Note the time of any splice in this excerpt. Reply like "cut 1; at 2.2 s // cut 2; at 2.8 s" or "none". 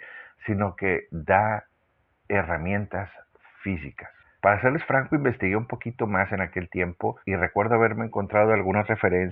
cut 1; at 4.4 s // cut 2; at 7.2 s